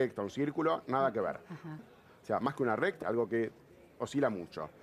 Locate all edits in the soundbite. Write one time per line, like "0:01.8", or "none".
0:01.8
0:03.0